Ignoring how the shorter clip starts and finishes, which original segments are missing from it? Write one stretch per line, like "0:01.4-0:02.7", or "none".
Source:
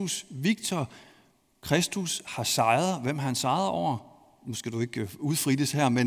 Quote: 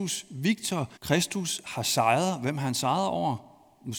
0:01.0-0:01.6